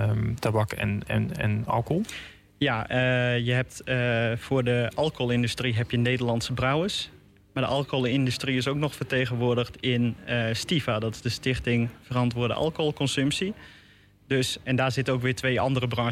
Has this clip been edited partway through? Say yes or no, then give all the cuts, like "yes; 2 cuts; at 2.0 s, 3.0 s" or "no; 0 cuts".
no; 0 cuts